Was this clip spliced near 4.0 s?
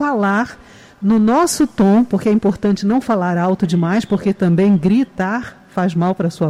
no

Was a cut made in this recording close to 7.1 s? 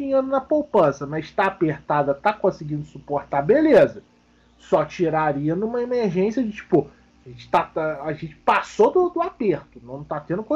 no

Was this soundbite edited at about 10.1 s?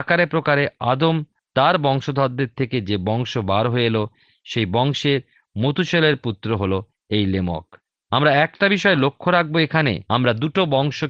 yes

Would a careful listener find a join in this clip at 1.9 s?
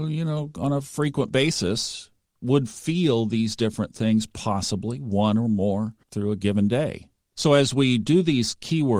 no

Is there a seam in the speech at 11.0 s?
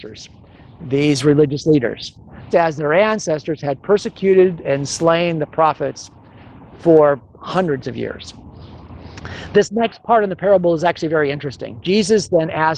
no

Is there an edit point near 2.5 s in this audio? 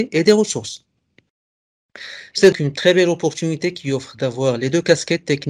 yes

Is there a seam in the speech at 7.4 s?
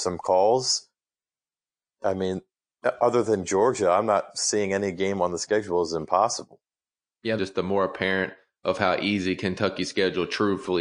yes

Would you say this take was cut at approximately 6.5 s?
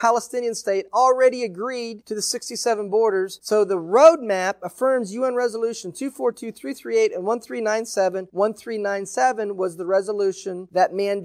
no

